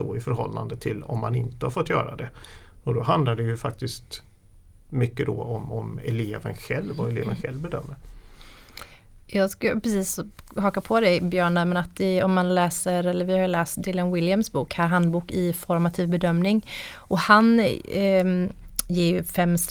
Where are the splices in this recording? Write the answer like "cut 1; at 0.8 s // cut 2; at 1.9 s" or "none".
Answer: none